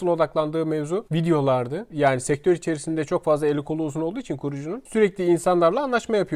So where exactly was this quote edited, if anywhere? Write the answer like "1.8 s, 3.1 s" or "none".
1.9 s